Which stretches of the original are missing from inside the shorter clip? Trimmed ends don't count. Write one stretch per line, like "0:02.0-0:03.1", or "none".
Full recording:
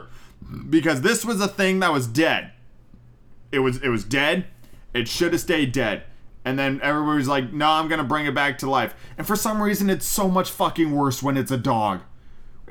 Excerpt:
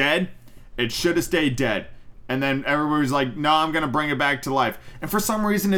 none